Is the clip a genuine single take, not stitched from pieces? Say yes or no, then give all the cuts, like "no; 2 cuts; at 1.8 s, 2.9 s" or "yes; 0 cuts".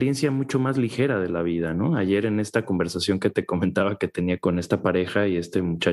yes; 0 cuts